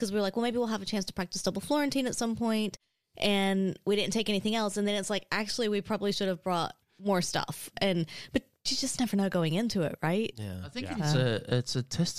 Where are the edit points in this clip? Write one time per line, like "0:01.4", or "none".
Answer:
none